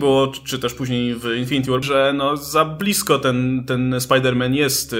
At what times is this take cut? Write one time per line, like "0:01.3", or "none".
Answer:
0:01.8